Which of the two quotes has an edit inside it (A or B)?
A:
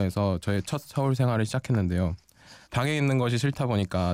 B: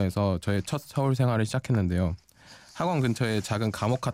A